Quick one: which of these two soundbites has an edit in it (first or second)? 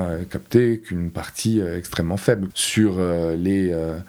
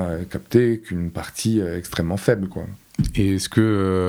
first